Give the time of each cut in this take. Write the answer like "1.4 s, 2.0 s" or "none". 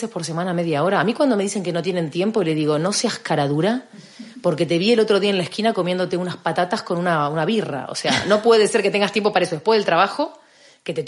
none